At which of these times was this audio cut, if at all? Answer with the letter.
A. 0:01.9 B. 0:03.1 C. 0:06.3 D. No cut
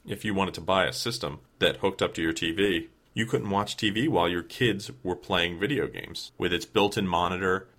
C